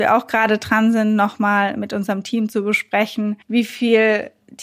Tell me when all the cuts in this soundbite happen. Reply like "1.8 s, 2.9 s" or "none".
3.4 s

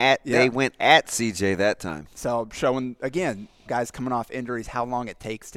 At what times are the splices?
3.7 s

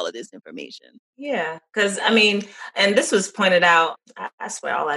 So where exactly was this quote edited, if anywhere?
none

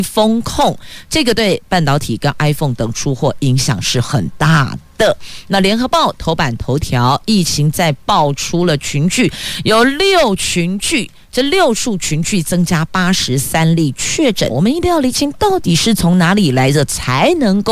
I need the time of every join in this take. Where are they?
14.5 s

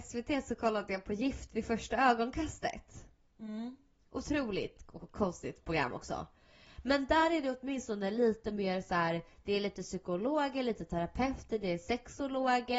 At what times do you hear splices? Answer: none

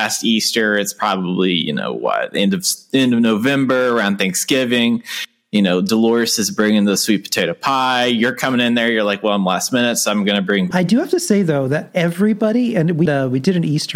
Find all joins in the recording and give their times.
10.7 s, 13.1 s

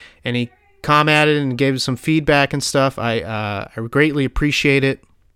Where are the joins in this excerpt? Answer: none

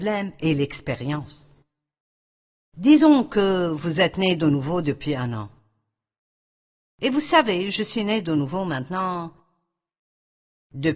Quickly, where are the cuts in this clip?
none

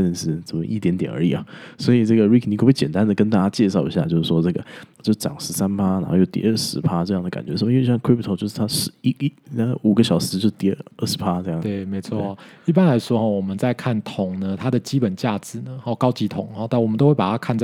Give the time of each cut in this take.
5.0 s

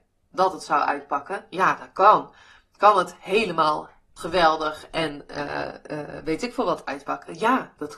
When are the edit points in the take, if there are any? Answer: 4.2 s

